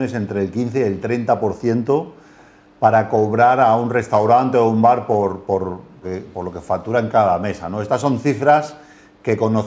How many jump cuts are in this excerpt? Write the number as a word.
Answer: one